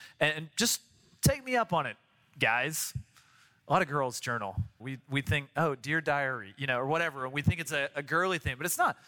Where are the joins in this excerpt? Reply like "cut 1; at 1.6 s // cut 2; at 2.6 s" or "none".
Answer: cut 1; at 4.8 s